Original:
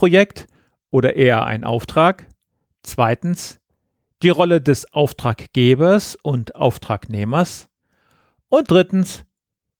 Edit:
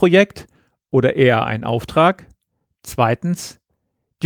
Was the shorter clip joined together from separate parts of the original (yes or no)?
no